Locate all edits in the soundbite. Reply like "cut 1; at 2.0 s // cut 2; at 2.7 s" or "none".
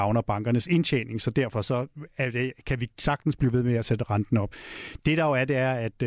none